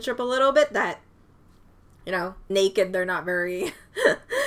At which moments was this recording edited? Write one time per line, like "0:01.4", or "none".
0:02.5